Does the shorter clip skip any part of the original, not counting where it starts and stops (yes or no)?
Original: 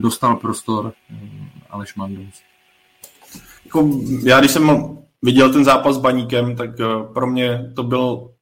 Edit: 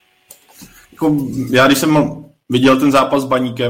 no